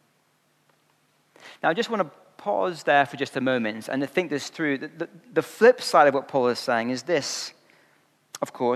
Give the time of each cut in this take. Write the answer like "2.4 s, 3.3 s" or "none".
none